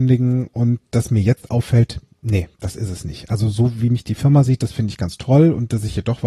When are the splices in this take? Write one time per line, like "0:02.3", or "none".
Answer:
none